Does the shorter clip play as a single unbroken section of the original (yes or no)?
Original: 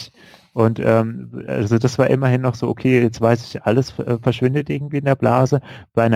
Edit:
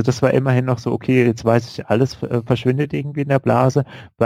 yes